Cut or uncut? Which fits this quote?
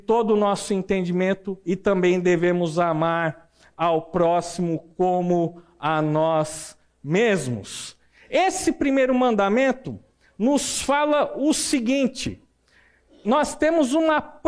uncut